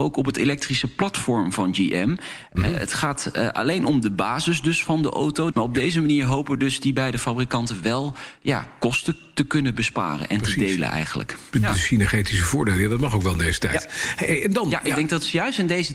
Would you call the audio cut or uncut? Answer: cut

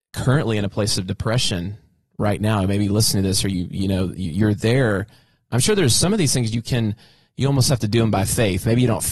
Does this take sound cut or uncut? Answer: uncut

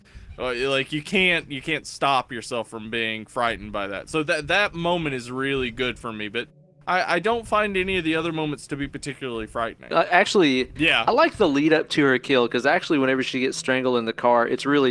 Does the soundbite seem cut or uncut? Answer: cut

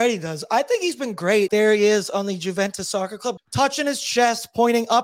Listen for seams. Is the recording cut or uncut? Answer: cut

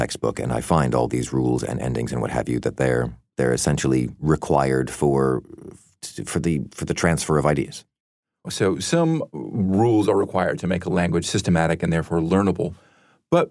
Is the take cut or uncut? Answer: cut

